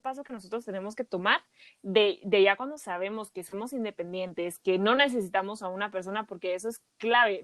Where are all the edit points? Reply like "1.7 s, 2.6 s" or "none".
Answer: none